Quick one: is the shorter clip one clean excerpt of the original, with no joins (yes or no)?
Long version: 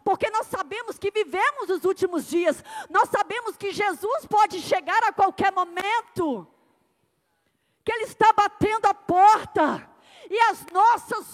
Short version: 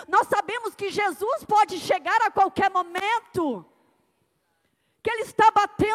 yes